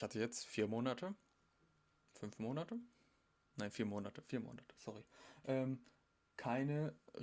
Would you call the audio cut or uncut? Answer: uncut